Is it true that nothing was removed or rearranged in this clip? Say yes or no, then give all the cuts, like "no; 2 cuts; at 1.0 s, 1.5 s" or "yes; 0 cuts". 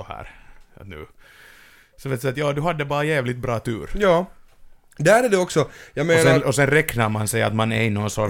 yes; 0 cuts